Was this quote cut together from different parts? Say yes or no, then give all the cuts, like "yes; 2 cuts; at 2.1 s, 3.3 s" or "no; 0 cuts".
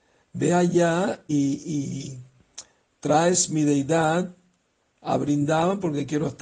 yes; 1 cut; at 1.3 s